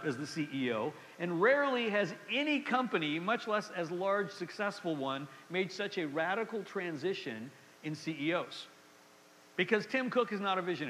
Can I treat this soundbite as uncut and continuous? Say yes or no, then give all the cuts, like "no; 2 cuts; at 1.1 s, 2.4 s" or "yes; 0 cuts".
yes; 0 cuts